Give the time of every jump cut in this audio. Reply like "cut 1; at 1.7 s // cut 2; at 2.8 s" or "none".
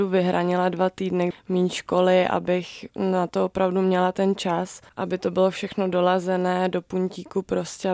cut 1; at 1.3 s